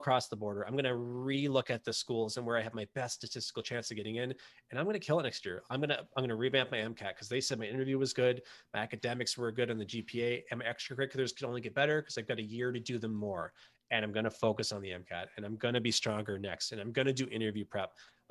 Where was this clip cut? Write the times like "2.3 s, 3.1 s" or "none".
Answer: none